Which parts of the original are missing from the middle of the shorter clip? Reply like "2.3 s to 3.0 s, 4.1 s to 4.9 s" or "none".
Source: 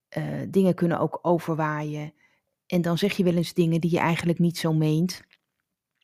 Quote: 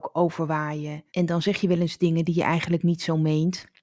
2.2 s to 2.6 s